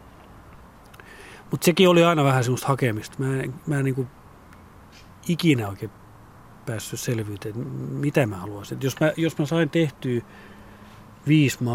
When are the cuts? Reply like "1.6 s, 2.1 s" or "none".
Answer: none